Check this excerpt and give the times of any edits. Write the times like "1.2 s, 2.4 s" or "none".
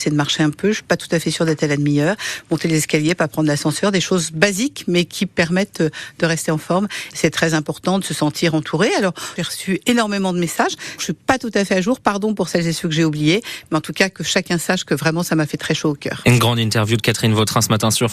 7.1 s, 9.4 s, 11.0 s